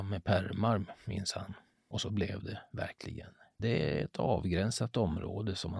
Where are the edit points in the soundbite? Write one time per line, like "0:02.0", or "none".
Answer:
0:03.6